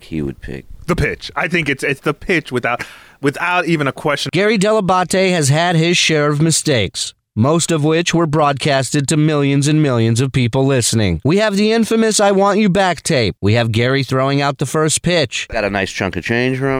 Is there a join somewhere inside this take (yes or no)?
yes